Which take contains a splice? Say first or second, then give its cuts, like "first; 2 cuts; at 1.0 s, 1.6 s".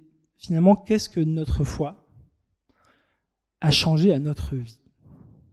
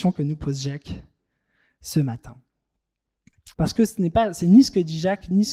second; 1 cut; at 3.5 s